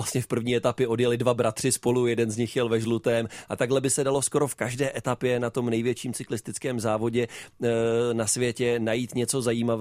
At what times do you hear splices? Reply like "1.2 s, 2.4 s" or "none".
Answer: none